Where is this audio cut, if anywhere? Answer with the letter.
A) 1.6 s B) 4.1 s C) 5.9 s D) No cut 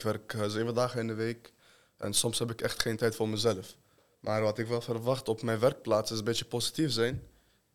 B